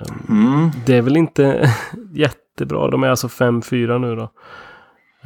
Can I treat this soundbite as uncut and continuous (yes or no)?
yes